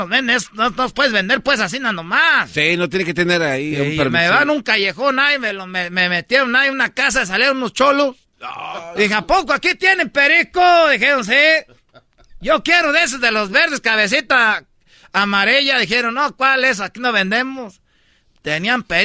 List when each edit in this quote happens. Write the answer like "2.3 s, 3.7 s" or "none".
none